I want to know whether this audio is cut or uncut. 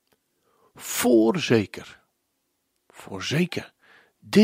uncut